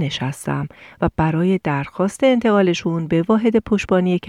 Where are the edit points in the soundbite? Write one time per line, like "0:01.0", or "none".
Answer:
none